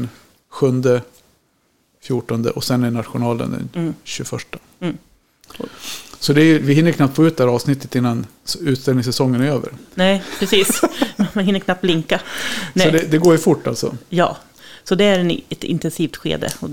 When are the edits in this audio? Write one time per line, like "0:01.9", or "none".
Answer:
none